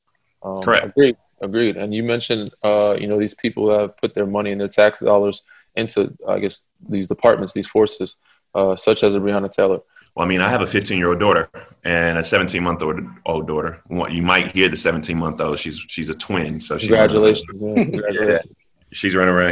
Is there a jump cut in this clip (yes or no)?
yes